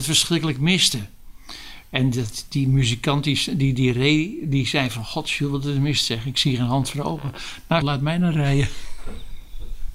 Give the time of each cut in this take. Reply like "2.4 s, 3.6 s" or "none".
7.8 s